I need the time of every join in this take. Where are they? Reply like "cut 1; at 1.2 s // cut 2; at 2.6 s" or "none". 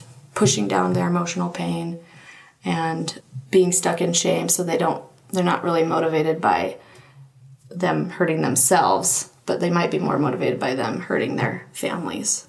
none